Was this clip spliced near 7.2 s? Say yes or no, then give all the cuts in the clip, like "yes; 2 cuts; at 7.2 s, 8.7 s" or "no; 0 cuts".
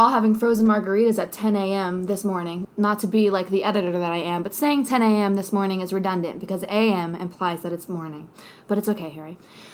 no; 1 cut; at 2.6 s